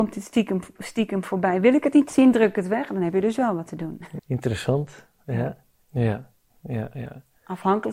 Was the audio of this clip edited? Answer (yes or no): yes